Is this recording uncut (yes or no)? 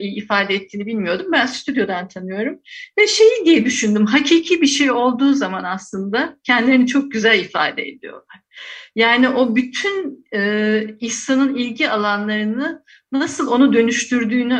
yes